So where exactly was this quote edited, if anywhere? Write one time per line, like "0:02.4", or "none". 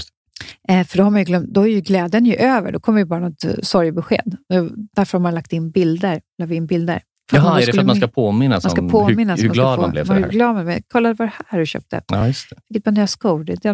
none